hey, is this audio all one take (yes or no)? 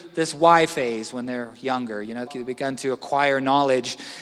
no